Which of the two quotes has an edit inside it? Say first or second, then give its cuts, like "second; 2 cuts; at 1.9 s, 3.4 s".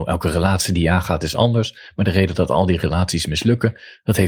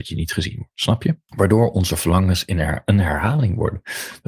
second; 1 cut; at 1.3 s